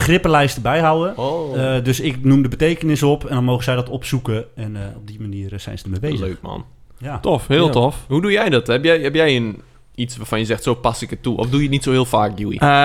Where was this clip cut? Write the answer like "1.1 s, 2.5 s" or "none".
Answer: none